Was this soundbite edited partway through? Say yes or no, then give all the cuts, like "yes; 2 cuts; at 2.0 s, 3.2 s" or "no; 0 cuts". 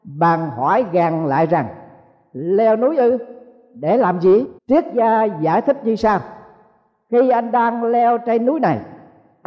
yes; 1 cut; at 4.6 s